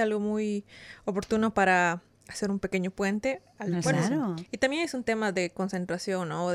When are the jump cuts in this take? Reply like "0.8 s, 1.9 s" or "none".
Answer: 3.7 s